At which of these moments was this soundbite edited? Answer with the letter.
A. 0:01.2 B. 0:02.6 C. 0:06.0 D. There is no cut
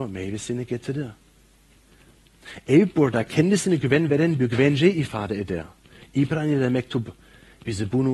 C